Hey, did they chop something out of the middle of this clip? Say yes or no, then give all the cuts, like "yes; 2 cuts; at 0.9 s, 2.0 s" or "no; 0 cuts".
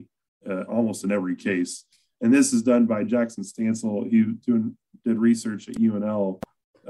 no; 0 cuts